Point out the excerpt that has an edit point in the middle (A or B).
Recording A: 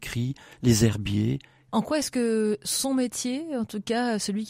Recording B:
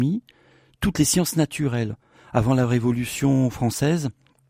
A